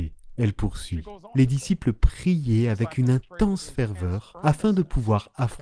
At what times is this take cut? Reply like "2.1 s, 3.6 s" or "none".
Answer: none